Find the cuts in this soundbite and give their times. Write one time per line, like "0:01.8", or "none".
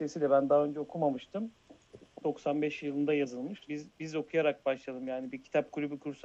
0:02.2
0:03.7